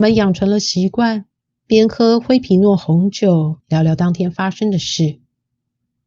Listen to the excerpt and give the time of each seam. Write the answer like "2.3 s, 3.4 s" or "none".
3.6 s